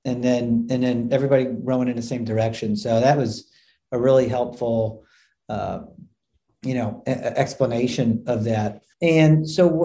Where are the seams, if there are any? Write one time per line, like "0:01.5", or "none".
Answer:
0:08.9